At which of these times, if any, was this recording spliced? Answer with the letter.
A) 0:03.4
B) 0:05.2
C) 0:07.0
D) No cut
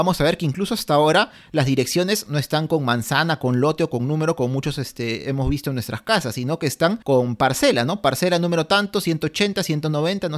C